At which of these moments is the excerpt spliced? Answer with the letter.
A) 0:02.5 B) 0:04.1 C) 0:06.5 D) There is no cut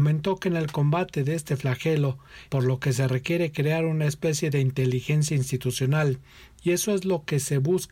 A